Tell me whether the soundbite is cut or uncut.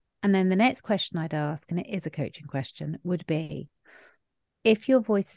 uncut